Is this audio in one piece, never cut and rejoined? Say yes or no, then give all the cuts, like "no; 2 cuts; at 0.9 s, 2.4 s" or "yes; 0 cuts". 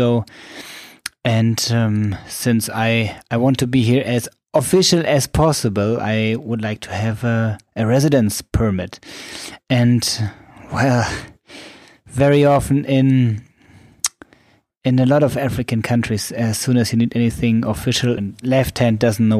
no; 1 cut; at 18.2 s